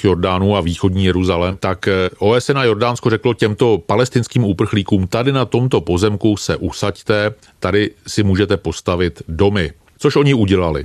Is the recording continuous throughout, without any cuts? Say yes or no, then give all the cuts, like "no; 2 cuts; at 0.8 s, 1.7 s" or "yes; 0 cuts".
yes; 0 cuts